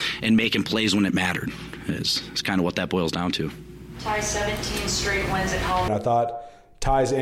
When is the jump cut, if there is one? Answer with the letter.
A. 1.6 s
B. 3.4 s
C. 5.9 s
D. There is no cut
C